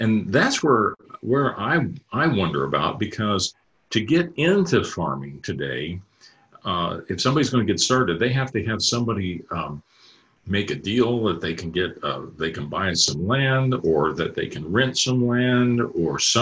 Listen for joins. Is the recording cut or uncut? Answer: uncut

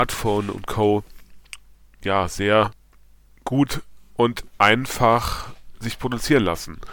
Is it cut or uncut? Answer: cut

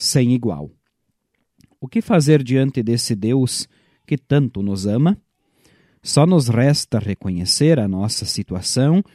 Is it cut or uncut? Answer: uncut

